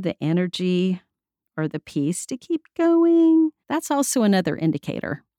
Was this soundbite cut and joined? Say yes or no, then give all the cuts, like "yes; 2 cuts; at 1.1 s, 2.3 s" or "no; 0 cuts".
yes; 2 cuts; at 1.4 s, 3.6 s